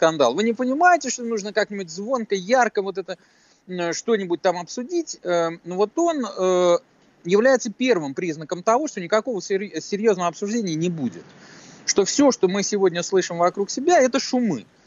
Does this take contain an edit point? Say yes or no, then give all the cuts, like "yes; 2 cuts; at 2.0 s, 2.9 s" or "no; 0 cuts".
no; 0 cuts